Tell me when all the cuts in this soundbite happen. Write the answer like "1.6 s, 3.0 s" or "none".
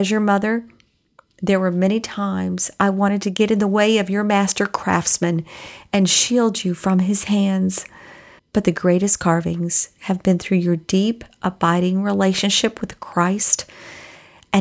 8.4 s